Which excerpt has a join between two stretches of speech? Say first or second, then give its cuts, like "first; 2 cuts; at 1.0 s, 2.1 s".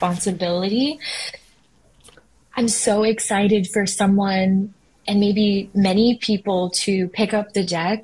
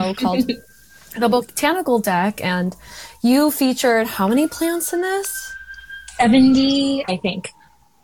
second; 1 cut; at 7.1 s